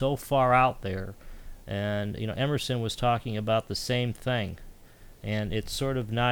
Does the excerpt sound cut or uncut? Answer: uncut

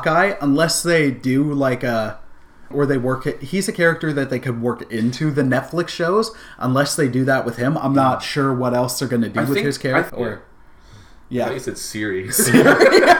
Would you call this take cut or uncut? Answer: cut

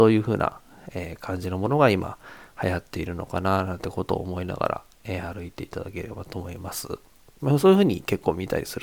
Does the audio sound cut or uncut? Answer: cut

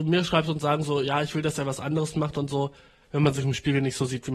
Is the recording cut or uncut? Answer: cut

